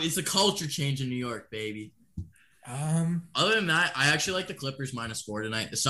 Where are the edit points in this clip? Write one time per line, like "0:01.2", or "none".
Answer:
none